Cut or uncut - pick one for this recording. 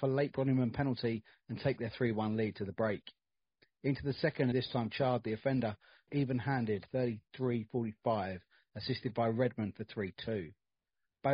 cut